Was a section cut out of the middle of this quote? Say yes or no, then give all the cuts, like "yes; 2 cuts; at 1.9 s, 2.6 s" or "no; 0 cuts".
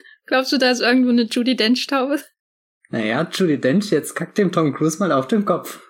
no; 0 cuts